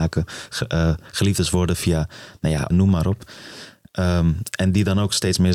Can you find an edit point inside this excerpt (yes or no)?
yes